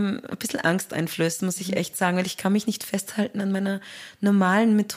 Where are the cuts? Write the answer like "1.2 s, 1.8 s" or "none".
none